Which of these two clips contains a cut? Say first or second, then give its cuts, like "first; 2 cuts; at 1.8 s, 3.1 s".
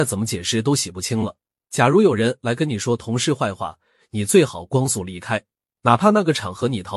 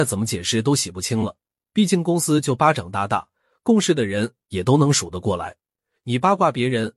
second; 1 cut; at 1.6 s